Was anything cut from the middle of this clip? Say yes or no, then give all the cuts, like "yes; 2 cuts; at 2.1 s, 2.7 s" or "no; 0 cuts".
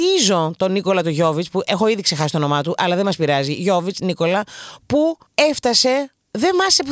yes; 1 cut; at 5.3 s